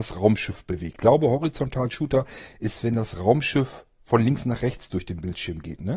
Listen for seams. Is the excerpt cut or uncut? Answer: cut